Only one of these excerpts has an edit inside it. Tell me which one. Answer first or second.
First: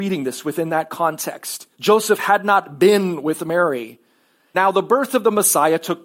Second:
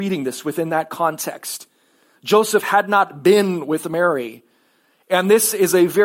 first